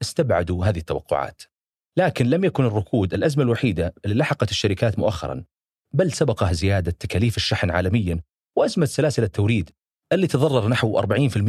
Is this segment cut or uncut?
uncut